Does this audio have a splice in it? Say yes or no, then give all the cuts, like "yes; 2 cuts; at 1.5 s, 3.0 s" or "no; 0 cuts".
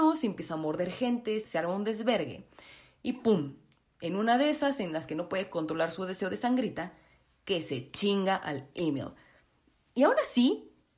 yes; 1 cut; at 1.4 s